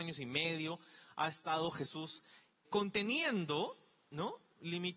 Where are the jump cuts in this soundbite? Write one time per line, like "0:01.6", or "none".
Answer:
0:02.6